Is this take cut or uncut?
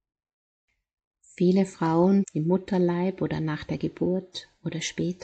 cut